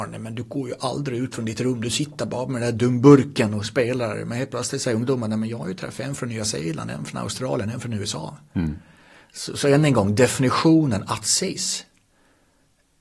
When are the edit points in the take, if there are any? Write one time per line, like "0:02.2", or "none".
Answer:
none